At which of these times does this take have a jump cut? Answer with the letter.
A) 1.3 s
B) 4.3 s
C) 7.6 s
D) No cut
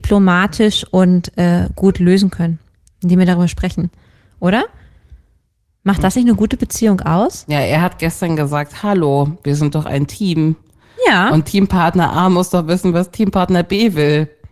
D